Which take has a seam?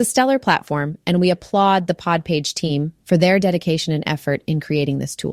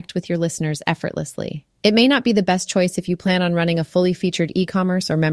second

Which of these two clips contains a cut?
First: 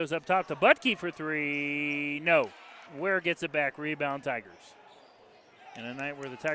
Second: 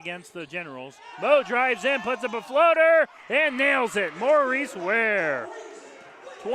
first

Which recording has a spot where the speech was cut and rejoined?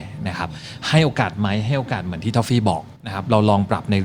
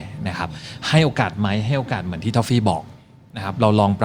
first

